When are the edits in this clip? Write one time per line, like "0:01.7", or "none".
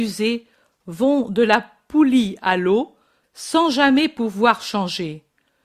0:03.2